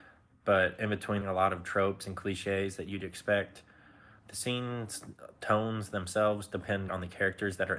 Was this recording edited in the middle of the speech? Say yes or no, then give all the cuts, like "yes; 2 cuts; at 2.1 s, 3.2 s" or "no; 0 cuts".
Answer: yes; 2 cuts; at 1.2 s, 6.9 s